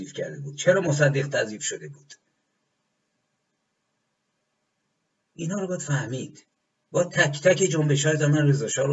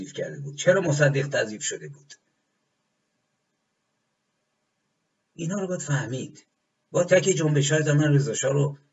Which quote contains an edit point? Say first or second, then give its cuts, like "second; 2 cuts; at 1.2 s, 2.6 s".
second; 1 cut; at 7.1 s